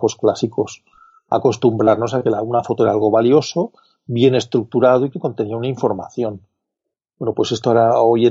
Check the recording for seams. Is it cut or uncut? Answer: uncut